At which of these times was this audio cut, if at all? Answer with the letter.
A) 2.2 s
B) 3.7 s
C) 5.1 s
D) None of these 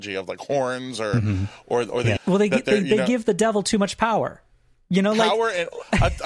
A